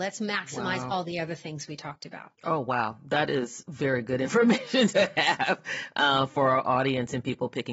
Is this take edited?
no; 0 cuts

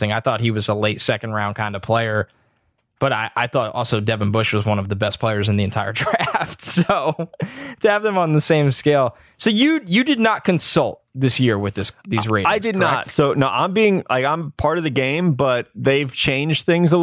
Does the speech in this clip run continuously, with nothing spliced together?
yes; 0 cuts

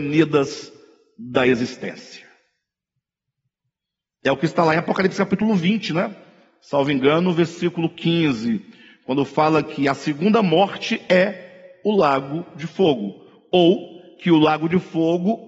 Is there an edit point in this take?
no; 0 cuts

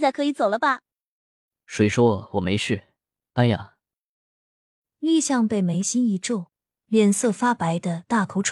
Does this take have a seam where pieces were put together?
yes; 2 cuts; at 3.2 s, 6.8 s

